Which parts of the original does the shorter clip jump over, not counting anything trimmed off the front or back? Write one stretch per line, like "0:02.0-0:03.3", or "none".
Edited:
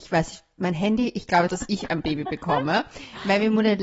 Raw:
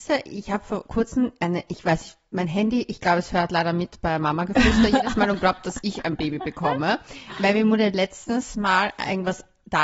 0:03.2-0:05.6